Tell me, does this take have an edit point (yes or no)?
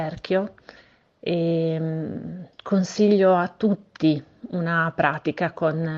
yes